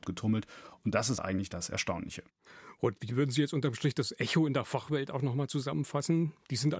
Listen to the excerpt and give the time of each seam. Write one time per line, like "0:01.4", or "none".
none